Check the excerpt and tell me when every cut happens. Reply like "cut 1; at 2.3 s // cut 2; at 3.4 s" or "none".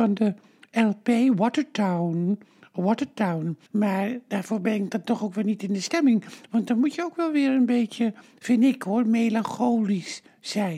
cut 1; at 3.7 s